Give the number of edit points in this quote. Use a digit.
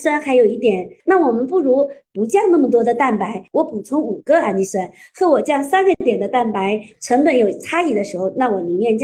3